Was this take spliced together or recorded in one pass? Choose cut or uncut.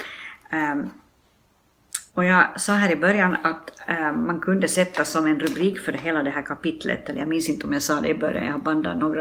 cut